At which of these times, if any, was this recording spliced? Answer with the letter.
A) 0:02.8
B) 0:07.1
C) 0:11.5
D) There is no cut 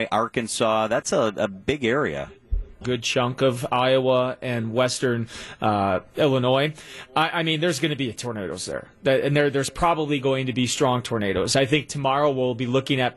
A